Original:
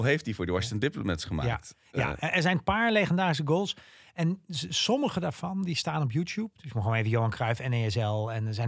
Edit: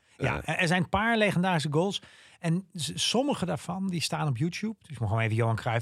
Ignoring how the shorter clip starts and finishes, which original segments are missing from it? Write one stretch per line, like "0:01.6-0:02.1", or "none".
none

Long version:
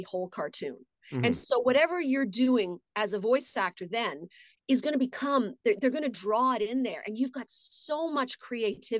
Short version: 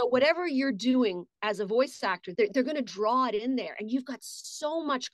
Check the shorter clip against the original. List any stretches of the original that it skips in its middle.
0:03.9-0:05.6

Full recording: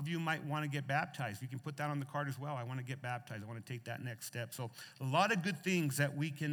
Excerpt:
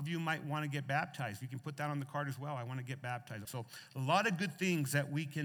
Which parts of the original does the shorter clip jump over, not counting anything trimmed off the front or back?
0:03.4-0:04.5

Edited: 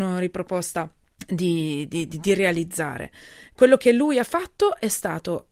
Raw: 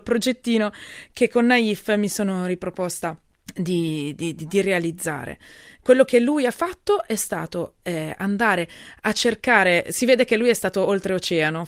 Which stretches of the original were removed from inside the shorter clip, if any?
none

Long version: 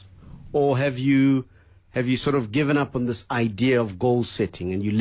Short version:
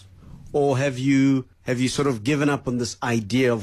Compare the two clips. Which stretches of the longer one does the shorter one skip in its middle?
0:01.5-0:01.8

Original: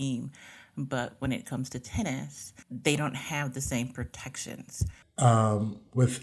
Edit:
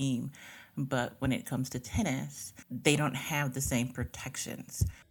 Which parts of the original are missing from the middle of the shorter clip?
none

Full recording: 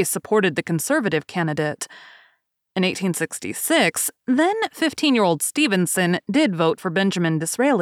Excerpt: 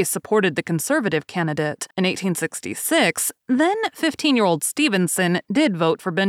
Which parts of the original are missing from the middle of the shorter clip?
0:01.9-0:02.7

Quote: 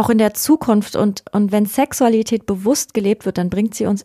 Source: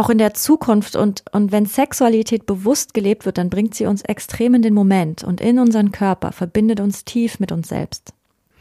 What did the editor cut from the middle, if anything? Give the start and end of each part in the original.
none

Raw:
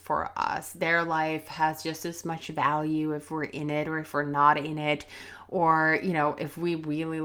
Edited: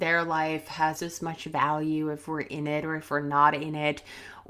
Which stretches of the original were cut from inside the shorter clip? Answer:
0:01.8-0:02.0

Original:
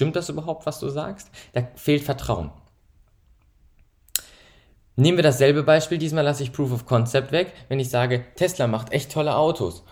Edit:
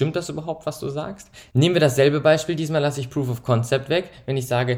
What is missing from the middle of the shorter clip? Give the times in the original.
0:01.5-0:04.9

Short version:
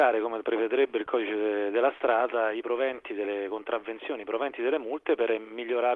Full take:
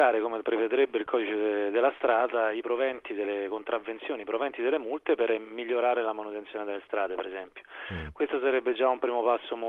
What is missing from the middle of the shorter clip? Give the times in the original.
none

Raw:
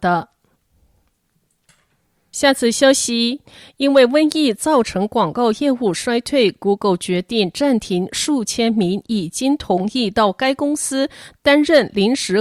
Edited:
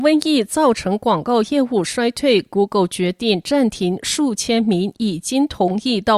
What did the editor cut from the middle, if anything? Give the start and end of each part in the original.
none

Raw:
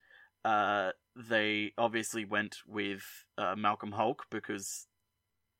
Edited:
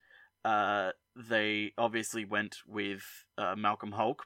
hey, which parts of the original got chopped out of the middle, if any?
none

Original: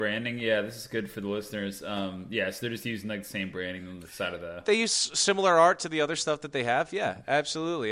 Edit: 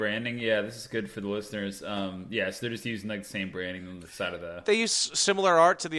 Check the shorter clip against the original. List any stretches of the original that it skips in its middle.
none

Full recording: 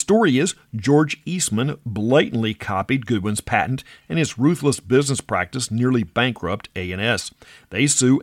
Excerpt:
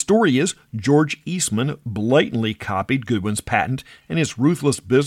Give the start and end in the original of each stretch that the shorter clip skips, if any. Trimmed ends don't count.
none

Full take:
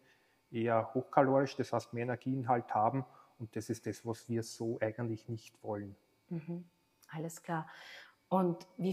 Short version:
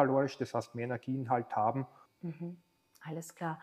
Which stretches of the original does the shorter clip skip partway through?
0:03.2-0:06.1

